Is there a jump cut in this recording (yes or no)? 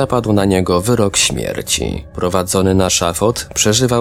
no